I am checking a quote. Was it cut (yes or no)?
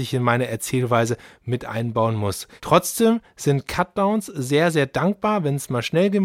no